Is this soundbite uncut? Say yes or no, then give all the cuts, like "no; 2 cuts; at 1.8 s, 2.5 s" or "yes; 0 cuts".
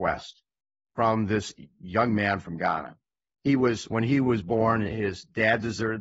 yes; 0 cuts